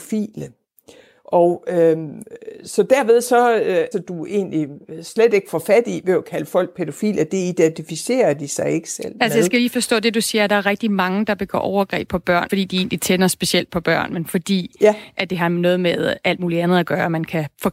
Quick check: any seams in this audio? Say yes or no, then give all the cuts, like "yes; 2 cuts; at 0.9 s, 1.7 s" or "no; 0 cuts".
yes; 3 cuts; at 3.9 s, 12.5 s, 14.1 s